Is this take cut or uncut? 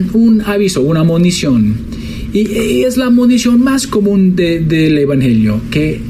uncut